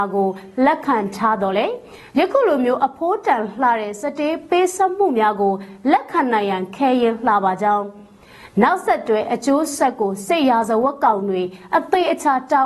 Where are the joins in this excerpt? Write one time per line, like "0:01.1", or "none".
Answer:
none

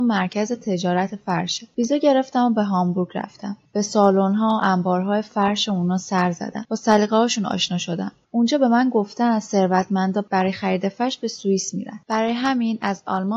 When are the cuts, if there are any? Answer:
none

